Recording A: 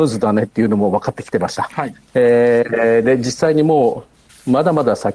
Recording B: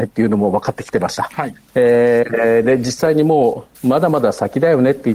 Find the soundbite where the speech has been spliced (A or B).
B